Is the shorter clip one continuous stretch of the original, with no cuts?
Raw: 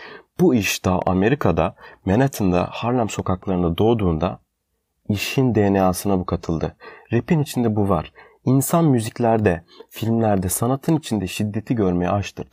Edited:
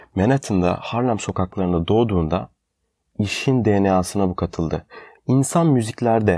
no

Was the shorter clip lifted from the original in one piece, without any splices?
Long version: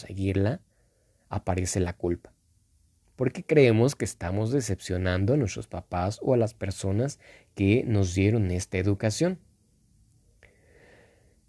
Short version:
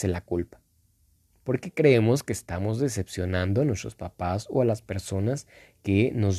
yes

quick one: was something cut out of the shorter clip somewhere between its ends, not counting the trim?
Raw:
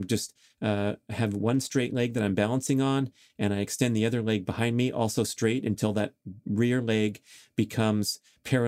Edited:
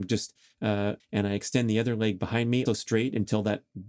yes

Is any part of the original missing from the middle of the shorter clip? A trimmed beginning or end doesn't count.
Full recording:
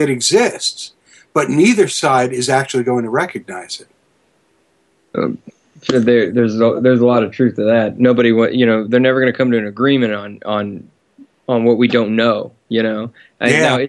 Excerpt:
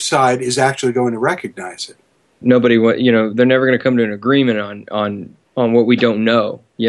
yes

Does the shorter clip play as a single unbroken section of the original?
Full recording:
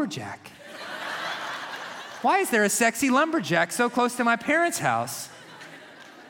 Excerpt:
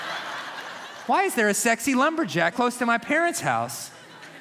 no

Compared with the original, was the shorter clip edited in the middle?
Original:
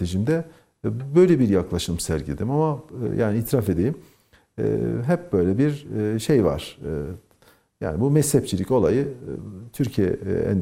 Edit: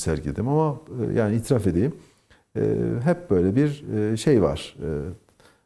no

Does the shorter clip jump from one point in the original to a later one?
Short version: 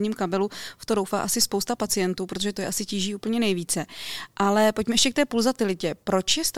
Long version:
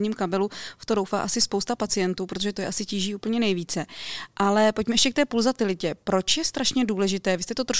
no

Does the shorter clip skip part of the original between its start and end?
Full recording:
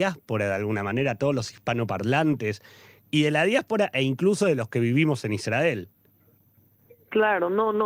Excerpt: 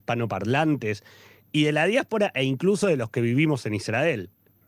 no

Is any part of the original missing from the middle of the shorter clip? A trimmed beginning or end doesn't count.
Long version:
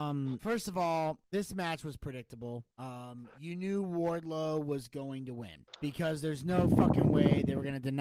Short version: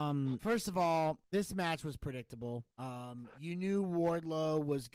no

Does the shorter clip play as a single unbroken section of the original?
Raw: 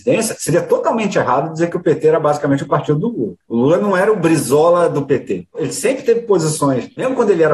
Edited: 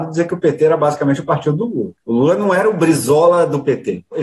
yes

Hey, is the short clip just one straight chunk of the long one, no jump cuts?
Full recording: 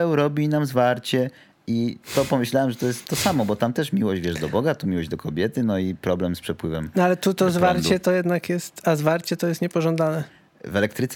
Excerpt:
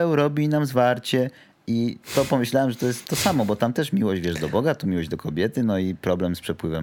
yes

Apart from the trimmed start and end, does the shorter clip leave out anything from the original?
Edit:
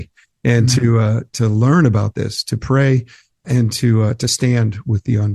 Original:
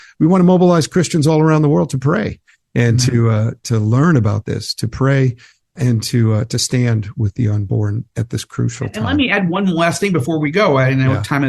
no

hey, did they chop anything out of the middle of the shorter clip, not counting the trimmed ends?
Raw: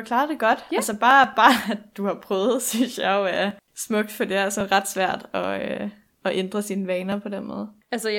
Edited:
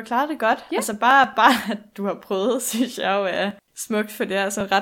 no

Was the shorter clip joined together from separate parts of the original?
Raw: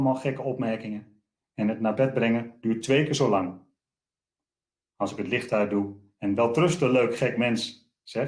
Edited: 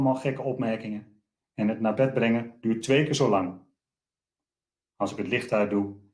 no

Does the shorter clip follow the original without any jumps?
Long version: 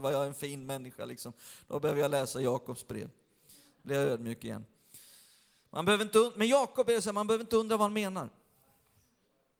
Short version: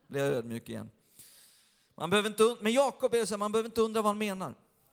yes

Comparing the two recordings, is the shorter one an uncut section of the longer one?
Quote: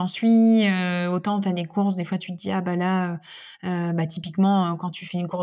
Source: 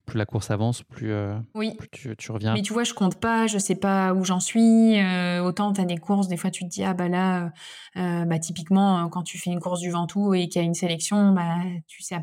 yes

